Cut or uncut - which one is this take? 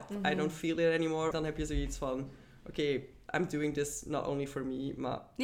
cut